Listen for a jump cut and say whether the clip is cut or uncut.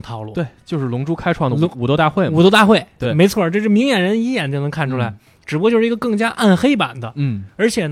uncut